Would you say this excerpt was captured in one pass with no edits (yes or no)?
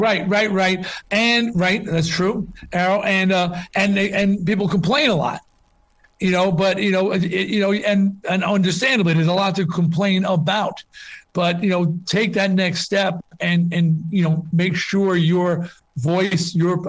yes